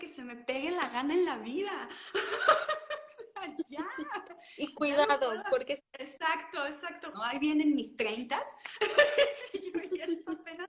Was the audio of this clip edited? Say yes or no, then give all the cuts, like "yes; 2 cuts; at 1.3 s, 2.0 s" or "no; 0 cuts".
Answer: yes; 2 cuts; at 5.8 s, 7.1 s